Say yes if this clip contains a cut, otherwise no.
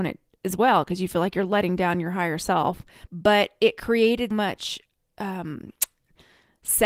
yes